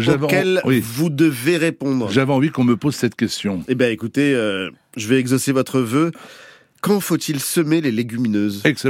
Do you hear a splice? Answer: no; 0 cuts

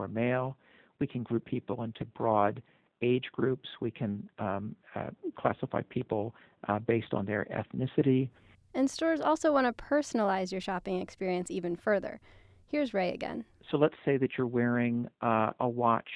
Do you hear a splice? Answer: no; 0 cuts

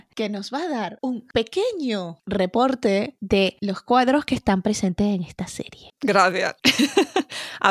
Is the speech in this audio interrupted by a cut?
yes; 1 cut; at 5.9 s

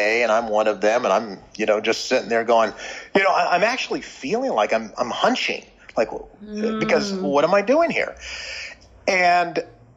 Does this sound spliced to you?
no; 0 cuts

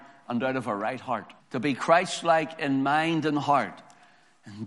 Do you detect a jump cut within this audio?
yes; 1 cut; at 1.4 s

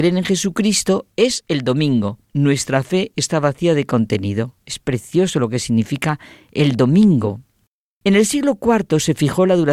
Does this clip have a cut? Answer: yes; 1 cut; at 2.2 s

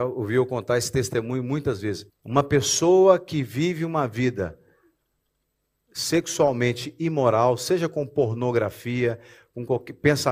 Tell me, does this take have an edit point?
yes; 1 cut; at 2.1 s

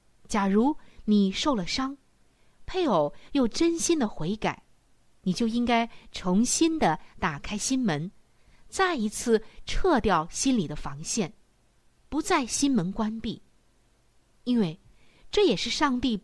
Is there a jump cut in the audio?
no; 0 cuts

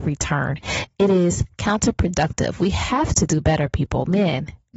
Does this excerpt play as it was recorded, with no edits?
yes; 0 cuts

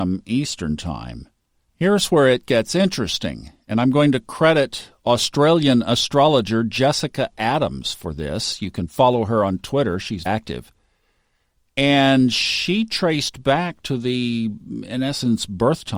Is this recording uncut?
no; 1 cut; at 10.3 s

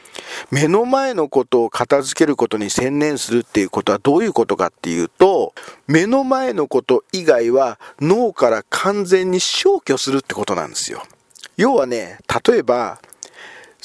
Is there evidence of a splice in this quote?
yes; 1 cut; at 11.5 s

